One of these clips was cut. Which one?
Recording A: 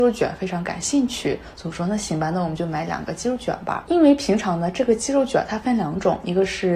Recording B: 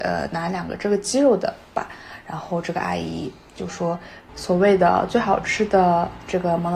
B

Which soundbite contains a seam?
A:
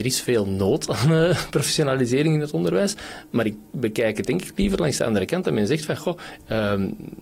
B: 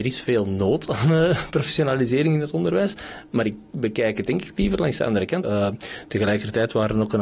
B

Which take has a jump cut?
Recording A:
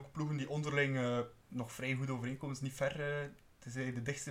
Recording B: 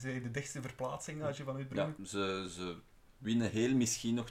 B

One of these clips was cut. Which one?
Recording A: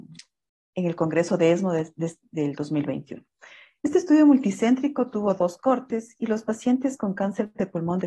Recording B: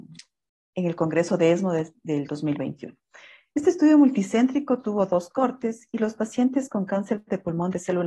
B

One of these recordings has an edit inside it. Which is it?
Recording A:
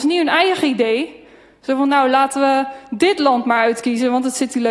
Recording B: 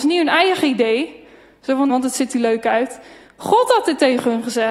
B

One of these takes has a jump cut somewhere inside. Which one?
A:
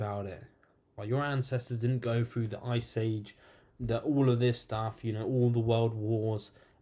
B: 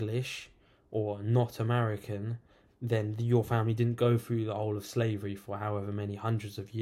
A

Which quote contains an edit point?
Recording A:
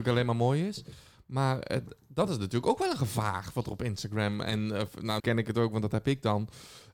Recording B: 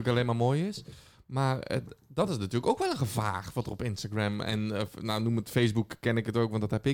A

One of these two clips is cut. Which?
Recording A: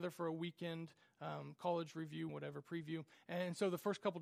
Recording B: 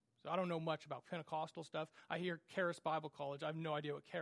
A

